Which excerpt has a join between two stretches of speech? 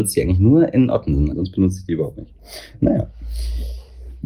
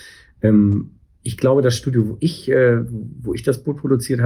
first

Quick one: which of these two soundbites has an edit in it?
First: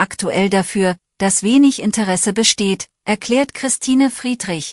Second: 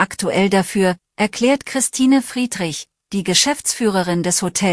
second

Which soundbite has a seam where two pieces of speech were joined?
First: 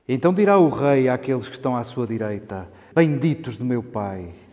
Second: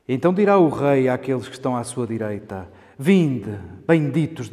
first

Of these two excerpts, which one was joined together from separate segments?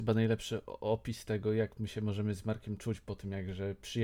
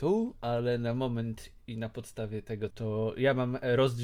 second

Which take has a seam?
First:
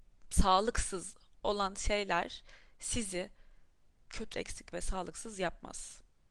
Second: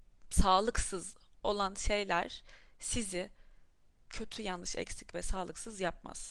first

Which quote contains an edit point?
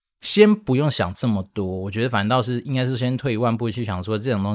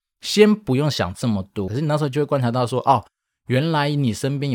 second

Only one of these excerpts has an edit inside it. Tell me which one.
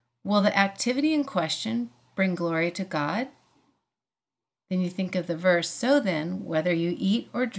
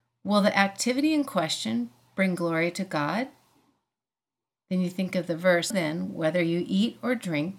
second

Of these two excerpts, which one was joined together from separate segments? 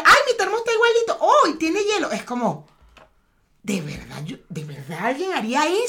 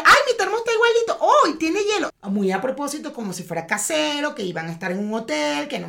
second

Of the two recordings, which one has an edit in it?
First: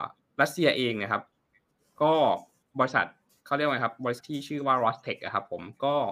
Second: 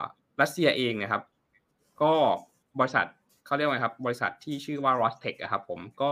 first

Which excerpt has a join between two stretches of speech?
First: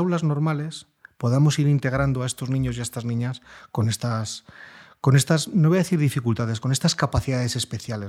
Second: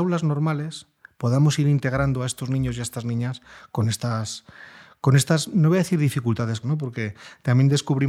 second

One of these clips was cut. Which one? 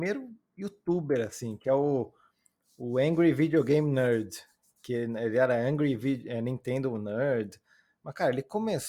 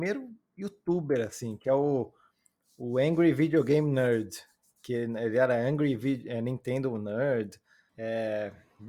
second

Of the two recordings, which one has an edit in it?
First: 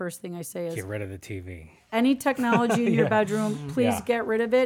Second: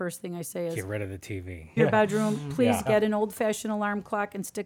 second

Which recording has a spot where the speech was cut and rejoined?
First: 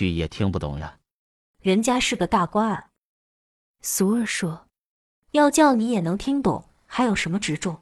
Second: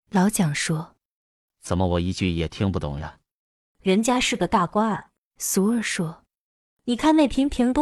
second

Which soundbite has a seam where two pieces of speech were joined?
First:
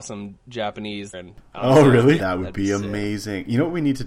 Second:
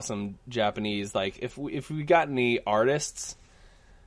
first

